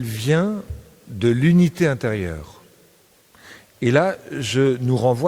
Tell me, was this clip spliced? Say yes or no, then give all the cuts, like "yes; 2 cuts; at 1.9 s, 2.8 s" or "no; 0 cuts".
no; 0 cuts